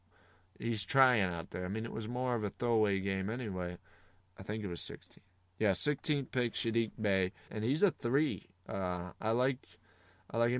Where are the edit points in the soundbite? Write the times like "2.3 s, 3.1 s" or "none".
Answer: 4.2 s, 7.5 s